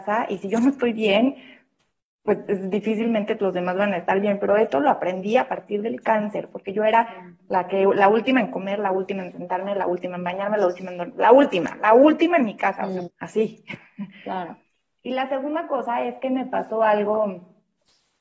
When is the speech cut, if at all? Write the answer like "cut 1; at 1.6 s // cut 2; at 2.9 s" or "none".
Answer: cut 1; at 13.1 s